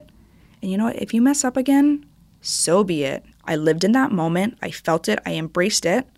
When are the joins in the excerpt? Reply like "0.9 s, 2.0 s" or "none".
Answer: 3.3 s, 4.6 s